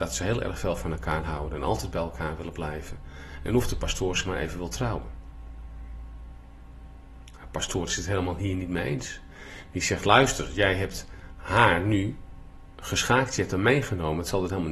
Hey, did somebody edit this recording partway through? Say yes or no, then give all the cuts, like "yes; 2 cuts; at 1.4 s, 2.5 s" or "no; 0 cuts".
no; 0 cuts